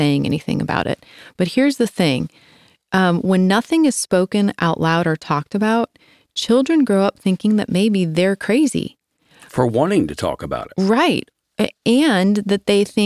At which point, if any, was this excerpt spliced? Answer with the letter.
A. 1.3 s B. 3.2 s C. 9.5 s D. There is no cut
D